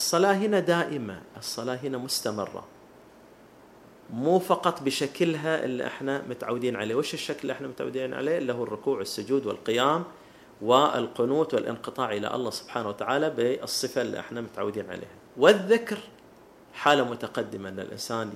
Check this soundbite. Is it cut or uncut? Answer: cut